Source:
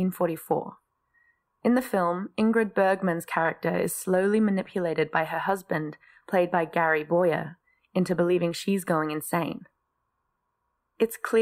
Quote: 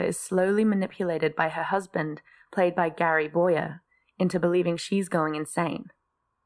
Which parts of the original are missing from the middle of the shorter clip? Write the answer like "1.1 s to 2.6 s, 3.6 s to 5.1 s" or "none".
none